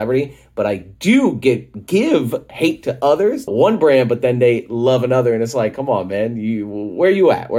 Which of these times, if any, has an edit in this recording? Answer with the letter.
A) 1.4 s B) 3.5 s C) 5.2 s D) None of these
B